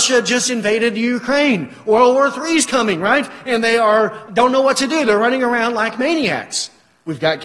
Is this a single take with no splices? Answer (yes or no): no